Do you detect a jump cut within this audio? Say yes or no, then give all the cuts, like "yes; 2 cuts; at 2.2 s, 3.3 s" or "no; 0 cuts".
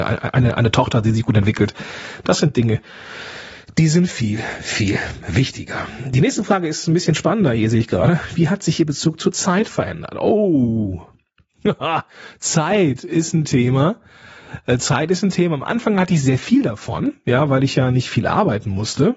no; 0 cuts